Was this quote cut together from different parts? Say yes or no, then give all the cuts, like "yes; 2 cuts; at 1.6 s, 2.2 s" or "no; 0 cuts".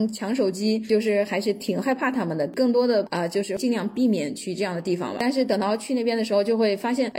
no; 0 cuts